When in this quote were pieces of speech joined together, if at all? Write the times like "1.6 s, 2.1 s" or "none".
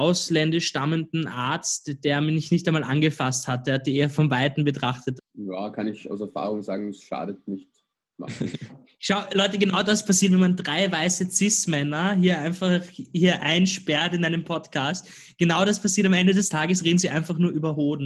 5.2 s